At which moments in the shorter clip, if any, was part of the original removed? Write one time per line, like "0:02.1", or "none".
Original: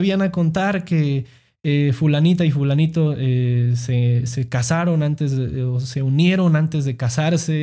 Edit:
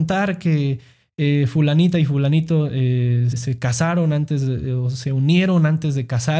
0:03.3